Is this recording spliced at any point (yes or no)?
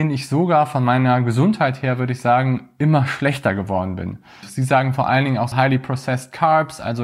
yes